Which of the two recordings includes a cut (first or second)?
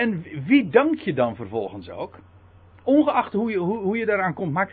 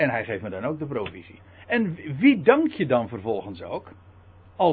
first